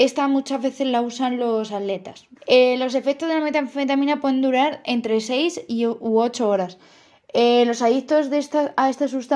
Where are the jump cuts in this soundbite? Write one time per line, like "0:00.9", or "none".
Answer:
0:02.4